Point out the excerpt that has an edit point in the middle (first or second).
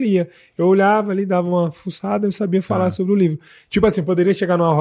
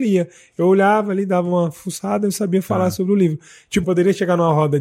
second